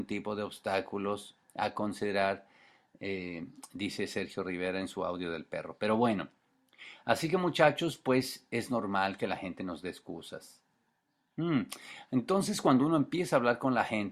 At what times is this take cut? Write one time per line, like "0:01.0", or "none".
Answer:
none